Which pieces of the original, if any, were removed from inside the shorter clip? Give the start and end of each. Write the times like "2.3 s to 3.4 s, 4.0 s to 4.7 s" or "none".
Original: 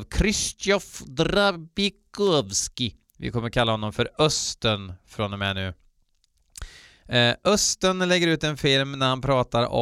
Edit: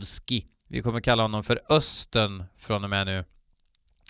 none